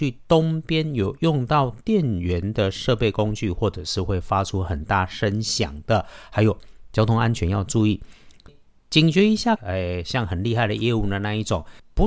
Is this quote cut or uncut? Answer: cut